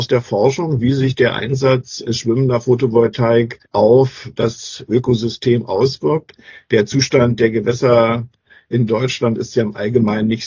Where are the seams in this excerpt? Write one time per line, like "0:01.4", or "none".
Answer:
0:03.7